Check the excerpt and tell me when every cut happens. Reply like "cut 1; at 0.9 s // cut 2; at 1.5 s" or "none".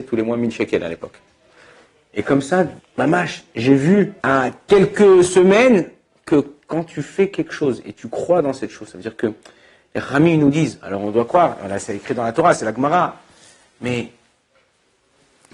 cut 1; at 2.8 s // cut 2; at 4.2 s